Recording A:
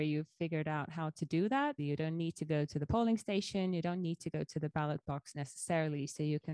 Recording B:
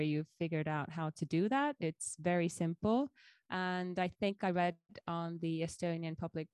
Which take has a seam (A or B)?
A